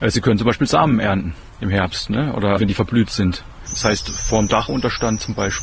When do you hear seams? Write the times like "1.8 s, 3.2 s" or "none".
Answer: 2.6 s, 3.7 s